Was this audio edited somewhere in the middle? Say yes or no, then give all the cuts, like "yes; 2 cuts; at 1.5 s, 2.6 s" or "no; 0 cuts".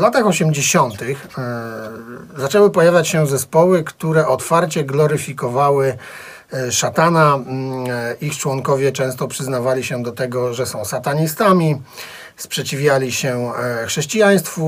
no; 0 cuts